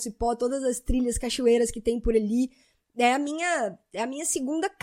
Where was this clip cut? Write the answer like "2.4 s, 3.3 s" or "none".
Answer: none